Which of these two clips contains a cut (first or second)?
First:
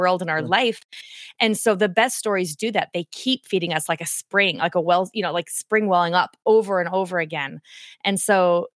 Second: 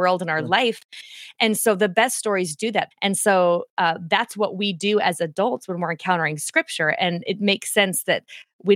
second